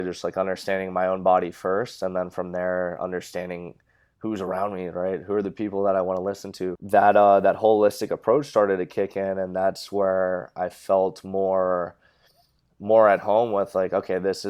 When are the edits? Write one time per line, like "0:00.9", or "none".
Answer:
0:06.8